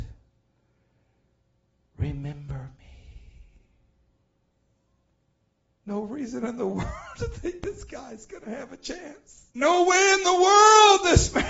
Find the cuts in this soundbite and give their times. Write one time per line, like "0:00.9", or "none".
0:09.5